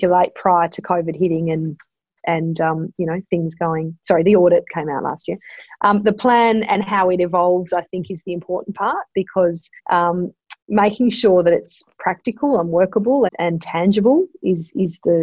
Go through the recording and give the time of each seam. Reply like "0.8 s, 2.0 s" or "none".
9.8 s, 13.3 s